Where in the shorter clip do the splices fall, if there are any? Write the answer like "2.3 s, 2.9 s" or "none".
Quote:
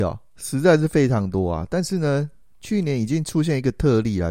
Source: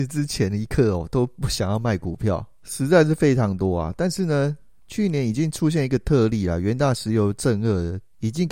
none